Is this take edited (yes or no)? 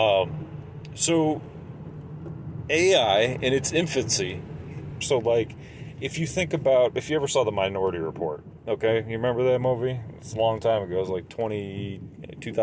yes